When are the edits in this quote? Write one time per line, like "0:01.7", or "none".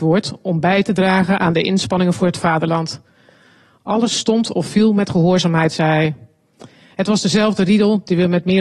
none